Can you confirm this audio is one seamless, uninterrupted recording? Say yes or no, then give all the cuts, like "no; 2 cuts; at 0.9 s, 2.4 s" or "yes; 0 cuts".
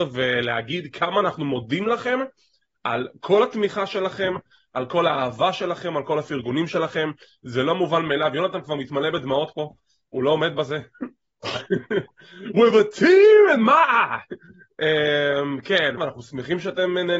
no; 1 cut; at 16.0 s